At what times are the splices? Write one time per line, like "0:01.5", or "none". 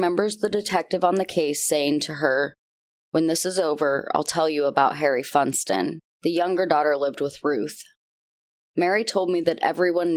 0:06.1